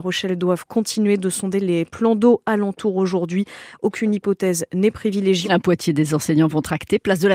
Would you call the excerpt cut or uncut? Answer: cut